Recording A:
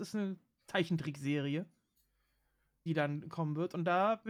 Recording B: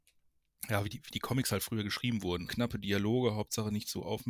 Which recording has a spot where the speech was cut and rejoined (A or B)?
B